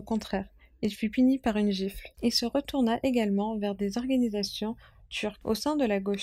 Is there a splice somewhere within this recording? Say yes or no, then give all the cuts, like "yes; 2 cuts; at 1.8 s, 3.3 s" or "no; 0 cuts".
yes; 1 cut; at 2.1 s